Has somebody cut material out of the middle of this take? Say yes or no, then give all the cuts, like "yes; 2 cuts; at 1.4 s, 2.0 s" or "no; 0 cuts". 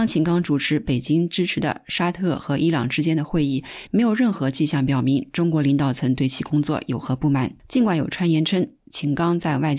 yes; 1 cut; at 3.9 s